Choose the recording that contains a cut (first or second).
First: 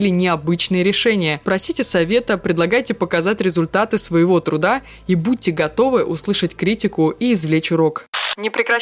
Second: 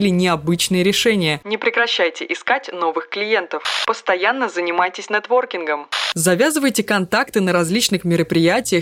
second